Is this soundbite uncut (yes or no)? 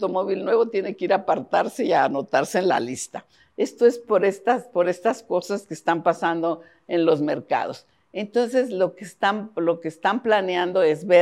yes